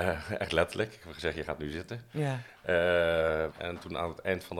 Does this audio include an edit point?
yes; 1 cut; at 3.5 s

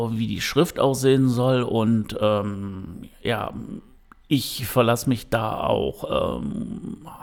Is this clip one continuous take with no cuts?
yes; 0 cuts

